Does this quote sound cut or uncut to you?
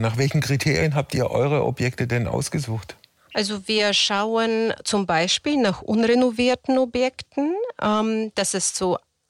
uncut